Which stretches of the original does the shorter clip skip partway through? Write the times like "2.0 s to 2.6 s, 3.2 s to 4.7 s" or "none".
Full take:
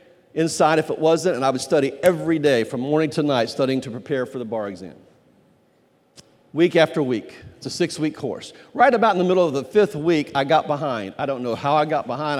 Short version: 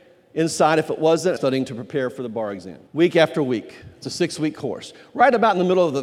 1.4 s to 3.5 s, 5.0 s to 6.5 s

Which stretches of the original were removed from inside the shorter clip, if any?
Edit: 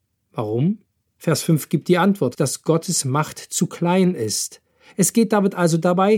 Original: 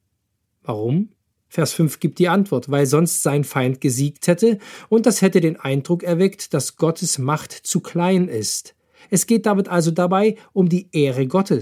2.7 s to 6.5 s

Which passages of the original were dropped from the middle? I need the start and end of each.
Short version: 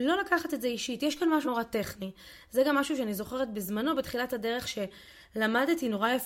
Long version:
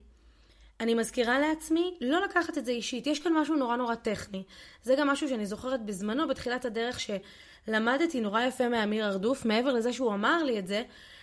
3.5 s to 3.8 s

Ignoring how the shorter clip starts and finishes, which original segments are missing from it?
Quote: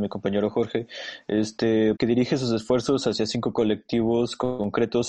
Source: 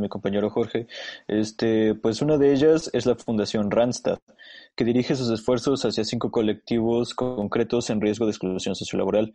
2.0 s to 4.7 s

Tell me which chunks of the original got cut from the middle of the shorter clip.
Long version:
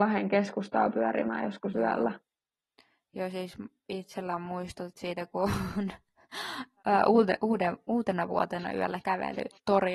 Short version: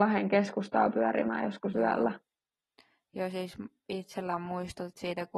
none

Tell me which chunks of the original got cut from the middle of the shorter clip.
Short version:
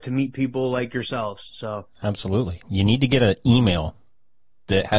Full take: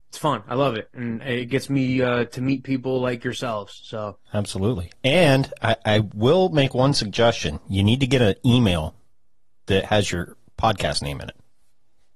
4.9 s to 7.6 s

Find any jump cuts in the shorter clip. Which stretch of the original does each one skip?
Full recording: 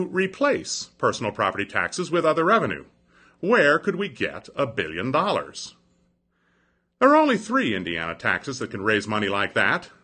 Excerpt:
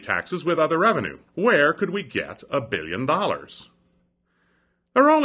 2.9 s to 3.3 s

